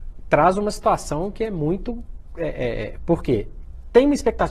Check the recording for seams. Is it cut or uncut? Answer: cut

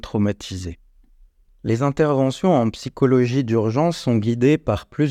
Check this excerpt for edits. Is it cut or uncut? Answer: uncut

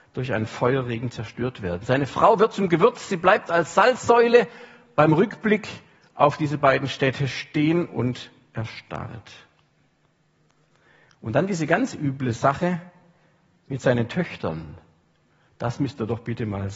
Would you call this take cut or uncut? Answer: uncut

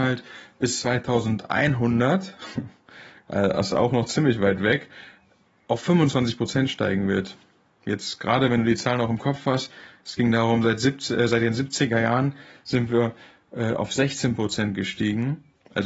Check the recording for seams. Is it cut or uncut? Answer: uncut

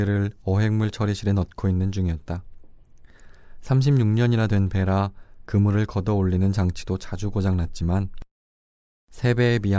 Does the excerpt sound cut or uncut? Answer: uncut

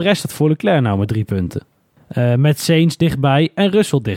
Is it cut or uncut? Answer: uncut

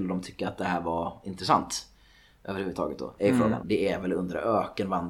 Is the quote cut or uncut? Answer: cut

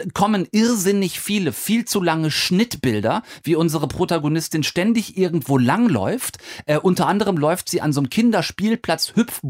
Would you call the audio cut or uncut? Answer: uncut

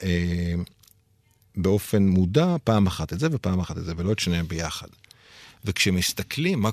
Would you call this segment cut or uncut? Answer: uncut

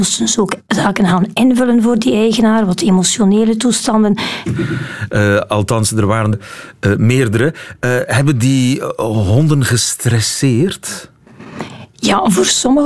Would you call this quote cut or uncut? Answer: cut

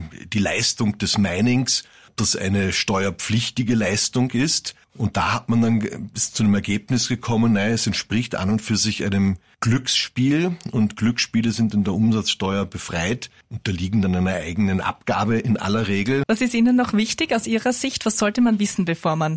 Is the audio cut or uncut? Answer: cut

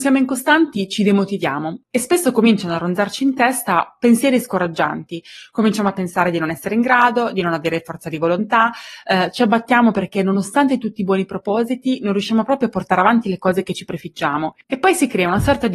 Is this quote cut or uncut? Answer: cut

